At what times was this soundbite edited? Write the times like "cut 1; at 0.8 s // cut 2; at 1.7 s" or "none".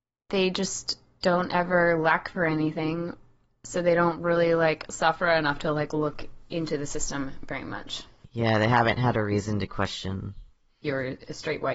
cut 1; at 10.8 s